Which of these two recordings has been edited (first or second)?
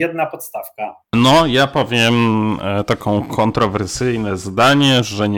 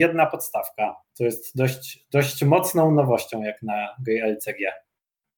first